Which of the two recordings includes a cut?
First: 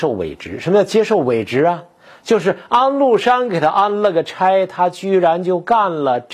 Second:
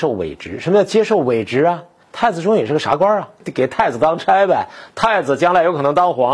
second; 1 cut; at 2.0 s

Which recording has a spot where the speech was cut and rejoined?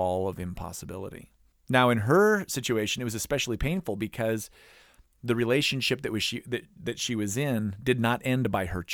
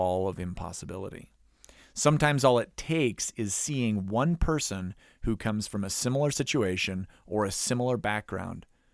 first; 1 cut; at 1.5 s

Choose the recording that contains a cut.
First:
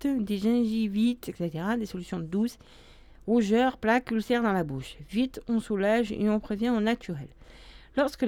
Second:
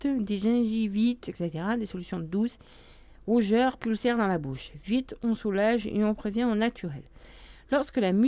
second; 1 cut; at 3.8 s

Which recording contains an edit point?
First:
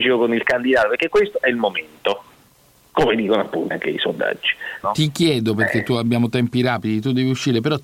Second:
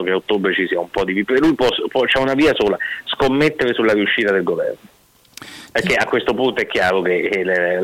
first; 2 cuts; at 3.7 s, 4.8 s

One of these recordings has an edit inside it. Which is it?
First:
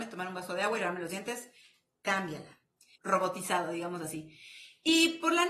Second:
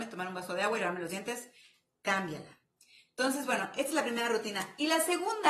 first; 1 cut; at 3.0 s

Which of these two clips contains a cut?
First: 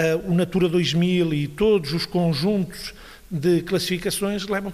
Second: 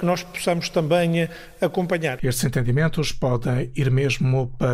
second; 1 cut; at 2.2 s

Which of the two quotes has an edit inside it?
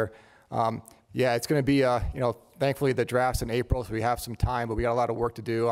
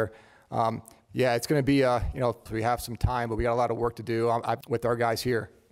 second; 2 cuts; at 2.5 s, 4.6 s

